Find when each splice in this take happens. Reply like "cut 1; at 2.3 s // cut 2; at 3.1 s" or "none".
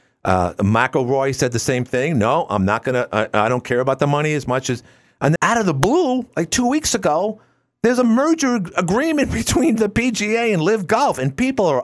cut 1; at 5.4 s